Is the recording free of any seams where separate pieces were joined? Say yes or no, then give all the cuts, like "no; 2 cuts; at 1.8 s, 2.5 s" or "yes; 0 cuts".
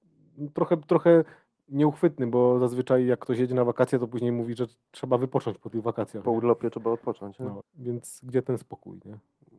no; 1 cut; at 7.6 s